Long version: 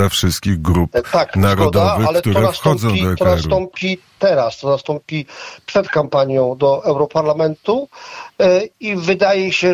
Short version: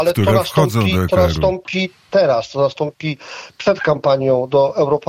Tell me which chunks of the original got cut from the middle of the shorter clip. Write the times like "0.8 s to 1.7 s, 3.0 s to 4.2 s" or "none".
none